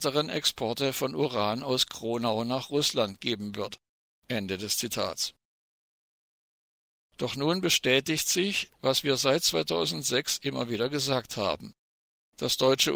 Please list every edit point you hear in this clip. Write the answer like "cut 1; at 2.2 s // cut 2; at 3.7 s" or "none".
cut 1; at 4.1 s // cut 2; at 7.0 s